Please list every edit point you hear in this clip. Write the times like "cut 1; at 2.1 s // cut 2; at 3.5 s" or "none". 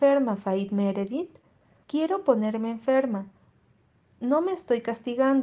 cut 1; at 1.8 s